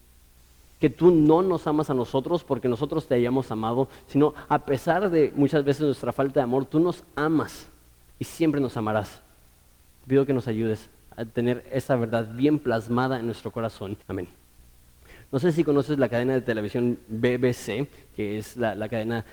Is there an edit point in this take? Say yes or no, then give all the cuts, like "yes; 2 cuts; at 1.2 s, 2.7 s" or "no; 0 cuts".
yes; 1 cut; at 14.0 s